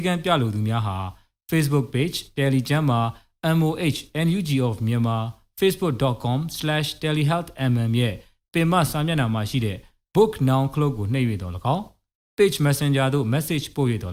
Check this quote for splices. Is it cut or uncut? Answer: uncut